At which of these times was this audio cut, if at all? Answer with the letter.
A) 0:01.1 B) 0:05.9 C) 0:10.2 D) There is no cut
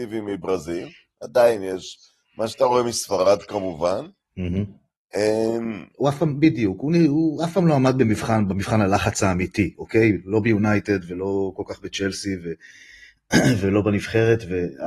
B